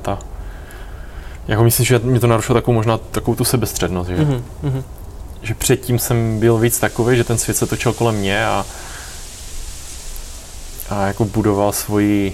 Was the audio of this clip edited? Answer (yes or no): no